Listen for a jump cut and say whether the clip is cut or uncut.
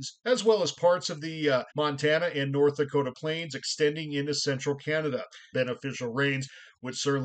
cut